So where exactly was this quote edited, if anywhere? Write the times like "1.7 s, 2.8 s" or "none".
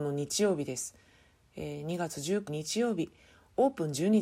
2.5 s